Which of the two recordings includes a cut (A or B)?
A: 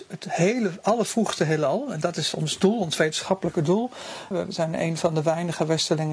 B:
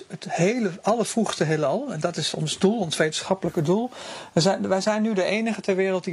A